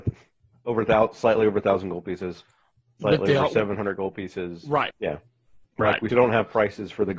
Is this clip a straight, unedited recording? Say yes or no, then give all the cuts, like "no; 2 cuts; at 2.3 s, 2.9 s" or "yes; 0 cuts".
no; 2 cuts; at 4.9 s, 6.1 s